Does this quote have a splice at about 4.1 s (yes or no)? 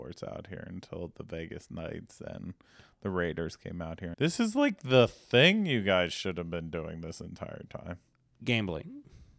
yes